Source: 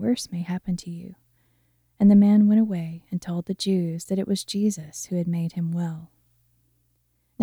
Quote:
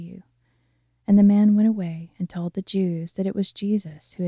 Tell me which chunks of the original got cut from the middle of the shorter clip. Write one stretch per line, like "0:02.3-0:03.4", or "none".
none